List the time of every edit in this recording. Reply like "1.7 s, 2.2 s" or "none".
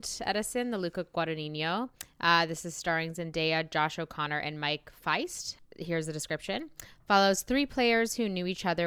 none

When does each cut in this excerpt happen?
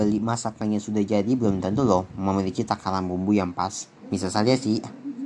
4.0 s

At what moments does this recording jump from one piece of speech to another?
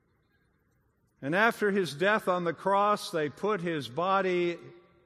none

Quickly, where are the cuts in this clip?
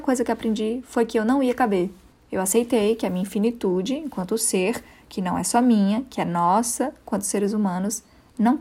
2.1 s

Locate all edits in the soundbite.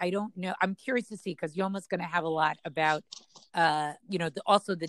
4.0 s

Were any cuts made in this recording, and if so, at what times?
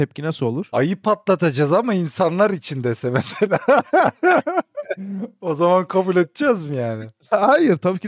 none

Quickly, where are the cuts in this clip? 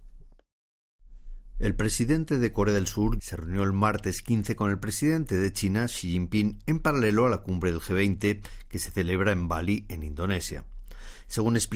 3.2 s

